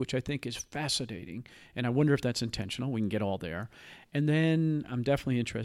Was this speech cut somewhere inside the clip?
no; 0 cuts

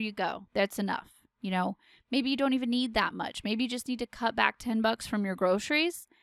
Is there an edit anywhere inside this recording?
no; 0 cuts

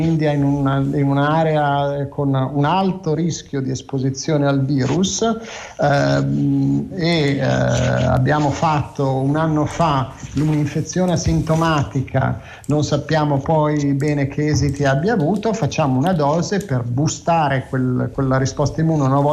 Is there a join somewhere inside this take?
no; 0 cuts

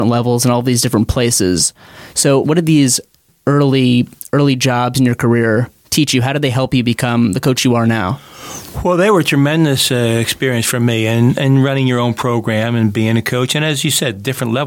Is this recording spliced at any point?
yes; 1 cut; at 2.4 s

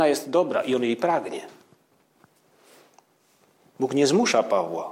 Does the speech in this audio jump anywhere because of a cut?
no; 0 cuts

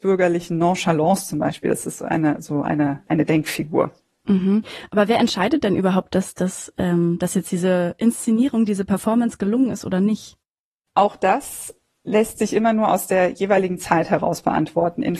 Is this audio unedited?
no; 1 cut; at 3.1 s

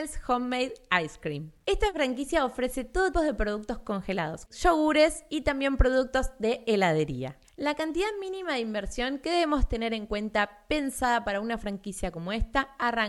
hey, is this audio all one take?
no; 2 cuts; at 3.1 s, 4.5 s

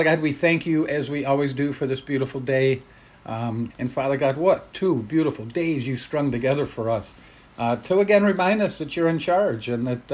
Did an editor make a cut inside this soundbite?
yes; 1 cut; at 3.7 s

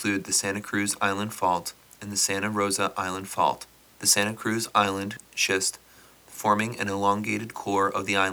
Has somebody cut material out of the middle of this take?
yes; 1 cut; at 3.9 s

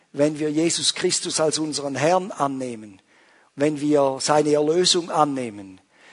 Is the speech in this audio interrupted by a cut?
no; 0 cuts

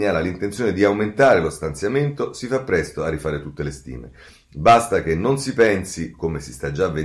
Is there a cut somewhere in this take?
no; 0 cuts

